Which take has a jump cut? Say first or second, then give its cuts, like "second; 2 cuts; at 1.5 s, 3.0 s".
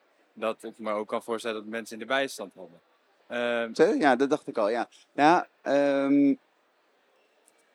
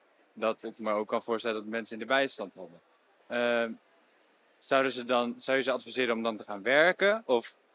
first; 1 cut; at 3.7 s